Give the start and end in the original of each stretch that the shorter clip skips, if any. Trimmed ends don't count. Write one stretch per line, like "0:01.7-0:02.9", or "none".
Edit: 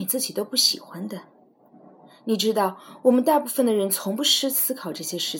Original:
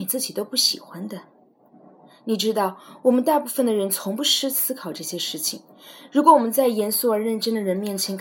none

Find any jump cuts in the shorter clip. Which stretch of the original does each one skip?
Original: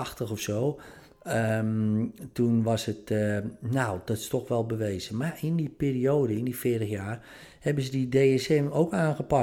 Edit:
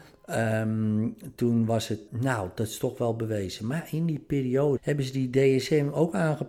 0:03.1-0:03.6
0:06.3-0:07.6

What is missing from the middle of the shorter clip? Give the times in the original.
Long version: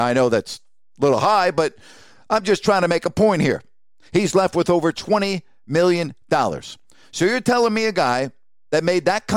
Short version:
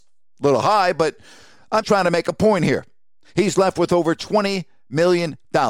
0:02.4-0:02.6

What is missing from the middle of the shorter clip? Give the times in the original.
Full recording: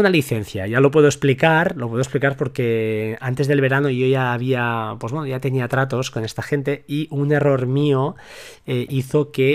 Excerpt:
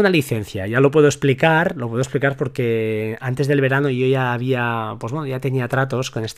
none

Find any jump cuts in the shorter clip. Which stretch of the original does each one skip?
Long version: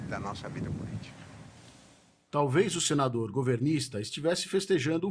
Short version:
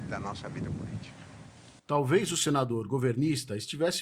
0:01.8-0:02.2

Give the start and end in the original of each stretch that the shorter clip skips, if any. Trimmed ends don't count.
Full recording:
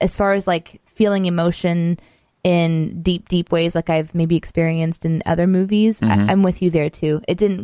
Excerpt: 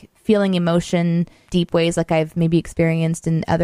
0:02.2-0:03.2

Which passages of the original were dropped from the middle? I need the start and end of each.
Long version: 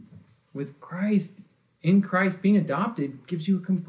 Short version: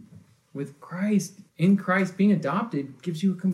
0:01.5-0:01.7

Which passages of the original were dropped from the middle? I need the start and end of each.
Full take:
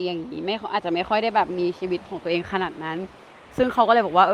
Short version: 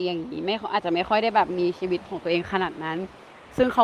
none

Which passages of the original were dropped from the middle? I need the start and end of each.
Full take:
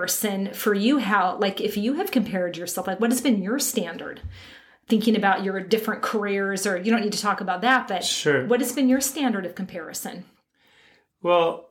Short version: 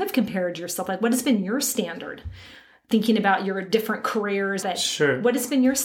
0:06.6-0:07.9

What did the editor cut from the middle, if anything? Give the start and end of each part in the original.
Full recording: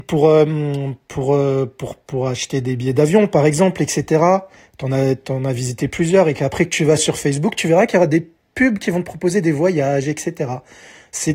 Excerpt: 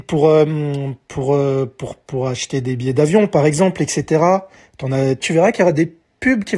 0:05.2-0:07.5

